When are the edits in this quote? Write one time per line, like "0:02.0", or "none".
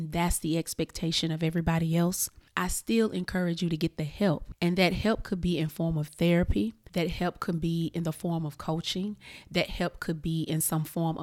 none